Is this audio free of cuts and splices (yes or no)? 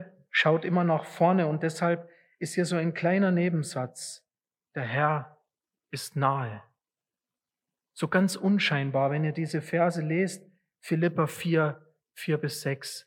yes